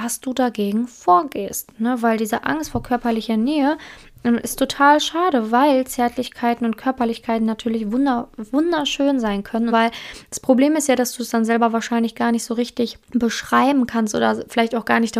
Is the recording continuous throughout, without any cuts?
no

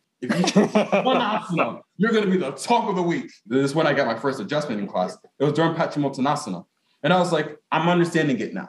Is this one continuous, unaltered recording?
no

